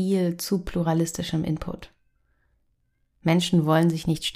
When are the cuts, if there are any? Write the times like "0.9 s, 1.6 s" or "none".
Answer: none